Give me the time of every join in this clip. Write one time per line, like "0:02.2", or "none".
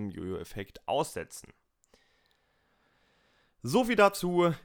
none